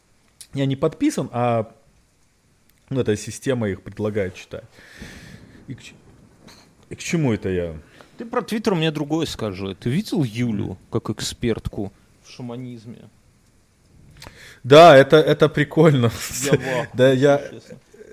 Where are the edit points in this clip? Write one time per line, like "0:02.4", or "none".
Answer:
none